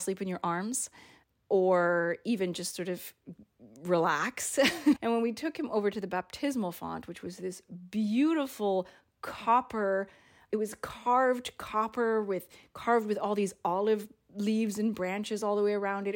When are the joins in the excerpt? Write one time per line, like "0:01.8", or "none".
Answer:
0:05.0